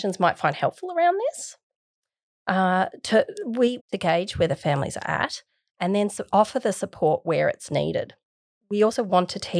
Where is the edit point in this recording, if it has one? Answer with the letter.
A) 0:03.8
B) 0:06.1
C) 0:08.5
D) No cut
A